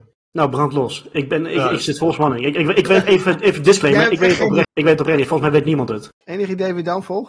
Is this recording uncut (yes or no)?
no